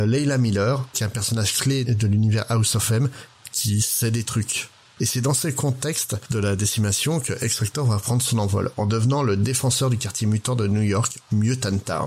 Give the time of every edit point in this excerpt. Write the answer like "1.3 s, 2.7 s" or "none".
0.9 s, 5.0 s